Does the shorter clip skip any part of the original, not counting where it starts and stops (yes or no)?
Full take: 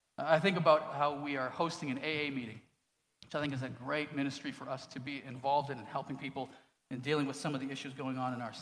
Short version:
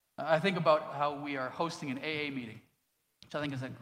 no